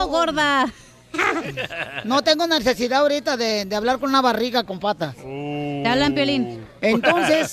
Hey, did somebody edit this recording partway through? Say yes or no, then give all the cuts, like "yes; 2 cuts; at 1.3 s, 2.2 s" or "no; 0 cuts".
no; 0 cuts